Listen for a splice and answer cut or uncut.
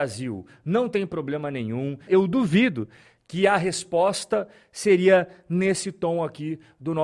cut